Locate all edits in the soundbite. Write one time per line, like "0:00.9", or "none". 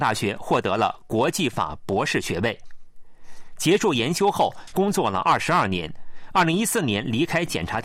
0:04.7